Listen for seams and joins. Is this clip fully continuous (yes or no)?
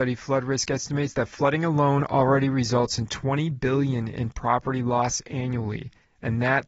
yes